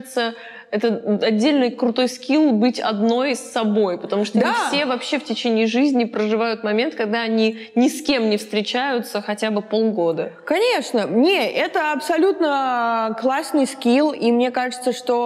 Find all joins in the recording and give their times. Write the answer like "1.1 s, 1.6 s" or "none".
none